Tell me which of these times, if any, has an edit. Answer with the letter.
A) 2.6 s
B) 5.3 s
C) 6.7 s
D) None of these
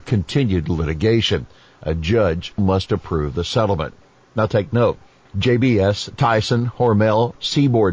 A